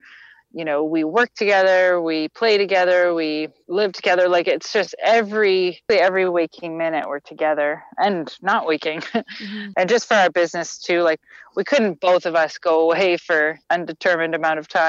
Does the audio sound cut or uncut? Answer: cut